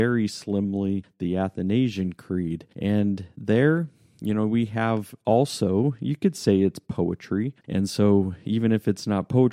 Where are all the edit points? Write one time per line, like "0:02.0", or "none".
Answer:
0:07.6